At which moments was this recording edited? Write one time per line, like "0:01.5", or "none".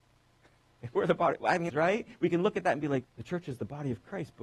0:01.7
0:03.0